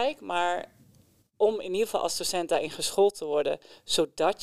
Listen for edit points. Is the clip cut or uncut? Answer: uncut